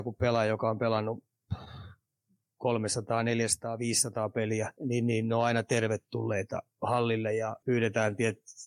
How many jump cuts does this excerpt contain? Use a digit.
2